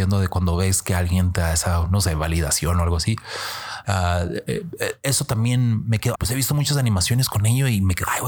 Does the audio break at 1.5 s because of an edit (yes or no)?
no